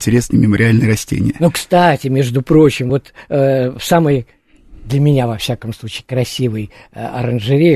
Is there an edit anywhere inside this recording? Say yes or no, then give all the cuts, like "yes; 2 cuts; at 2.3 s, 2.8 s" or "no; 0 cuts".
no; 0 cuts